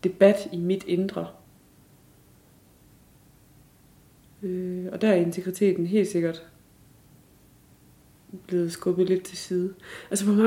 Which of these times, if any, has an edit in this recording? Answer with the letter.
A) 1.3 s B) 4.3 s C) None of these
C